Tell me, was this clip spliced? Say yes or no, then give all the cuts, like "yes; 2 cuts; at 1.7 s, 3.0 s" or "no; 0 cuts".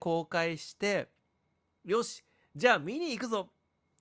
no; 0 cuts